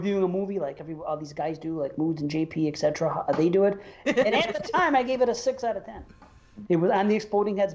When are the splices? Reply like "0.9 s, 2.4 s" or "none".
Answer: 4.0 s, 6.6 s